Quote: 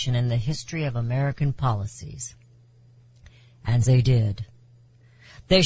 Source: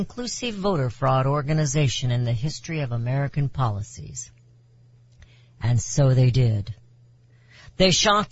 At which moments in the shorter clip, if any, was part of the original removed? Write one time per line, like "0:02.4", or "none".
0:03.9